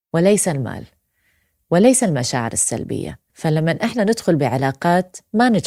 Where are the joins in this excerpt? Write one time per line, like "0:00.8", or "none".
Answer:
0:03.3